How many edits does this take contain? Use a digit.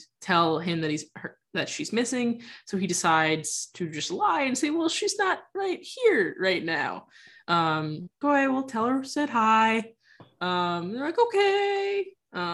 1